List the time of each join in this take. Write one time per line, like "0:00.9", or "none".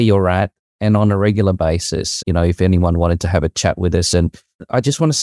0:02.2